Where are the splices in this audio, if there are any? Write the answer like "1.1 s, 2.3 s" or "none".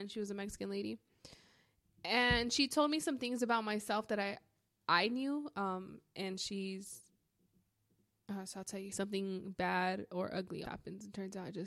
8.9 s, 10.6 s